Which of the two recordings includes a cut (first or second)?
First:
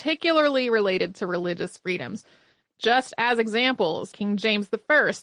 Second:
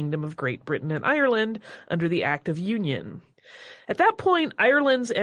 first